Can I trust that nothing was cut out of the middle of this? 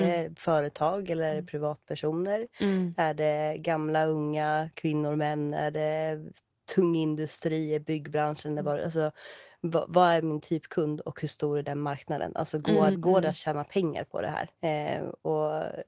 no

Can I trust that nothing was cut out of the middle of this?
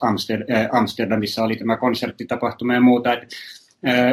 yes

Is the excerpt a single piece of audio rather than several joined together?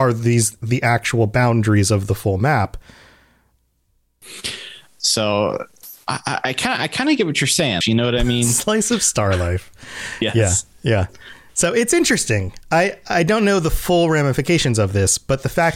no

